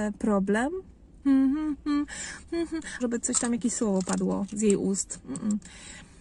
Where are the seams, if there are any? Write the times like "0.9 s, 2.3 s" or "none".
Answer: 1.2 s, 3.0 s